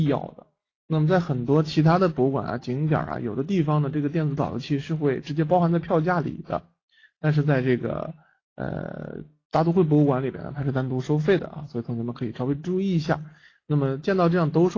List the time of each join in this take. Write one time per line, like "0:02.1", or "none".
none